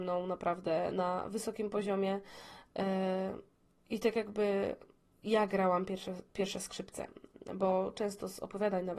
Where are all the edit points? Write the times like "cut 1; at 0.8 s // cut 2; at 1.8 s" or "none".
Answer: none

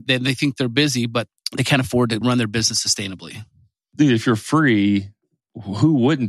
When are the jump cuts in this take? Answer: cut 1; at 2.2 s

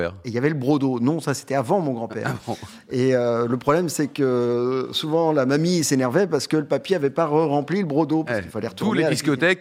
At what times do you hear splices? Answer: none

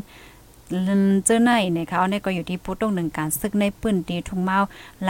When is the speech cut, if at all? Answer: none

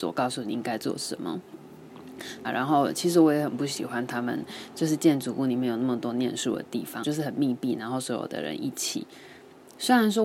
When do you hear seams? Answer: cut 1; at 2.4 s // cut 2; at 7.0 s

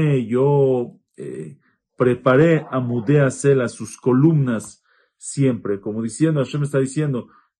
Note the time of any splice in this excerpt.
none

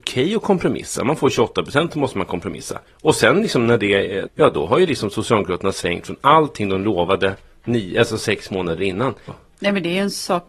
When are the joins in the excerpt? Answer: cut 1; at 2.9 s // cut 2; at 4.3 s // cut 3; at 9.3 s

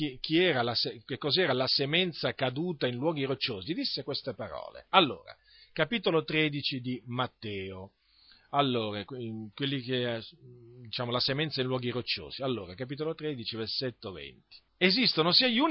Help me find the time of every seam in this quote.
cut 1; at 14.7 s

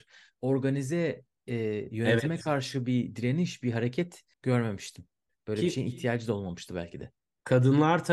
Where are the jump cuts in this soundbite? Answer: cut 1; at 4.3 s

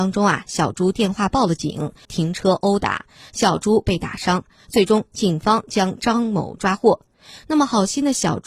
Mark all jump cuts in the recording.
cut 1; at 2.0 s

